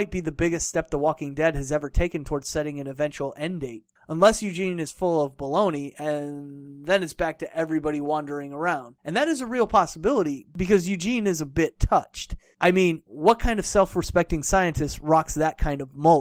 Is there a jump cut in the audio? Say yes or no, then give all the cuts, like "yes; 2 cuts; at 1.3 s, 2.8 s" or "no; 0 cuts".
no; 0 cuts